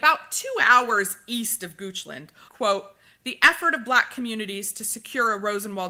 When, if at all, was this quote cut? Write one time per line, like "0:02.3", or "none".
0:02.5